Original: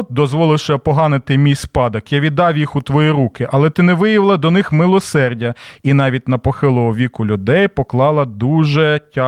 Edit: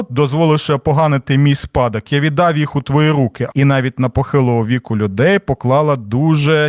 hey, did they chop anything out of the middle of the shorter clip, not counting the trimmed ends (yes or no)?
yes